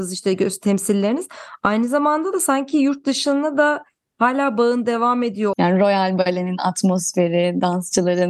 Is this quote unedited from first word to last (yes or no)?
no